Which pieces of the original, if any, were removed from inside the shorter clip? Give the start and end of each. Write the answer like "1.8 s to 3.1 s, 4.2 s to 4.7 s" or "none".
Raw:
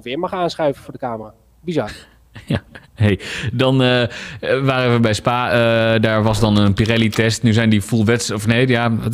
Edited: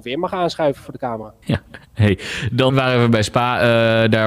1.4 s to 2.4 s, 3.7 s to 4.6 s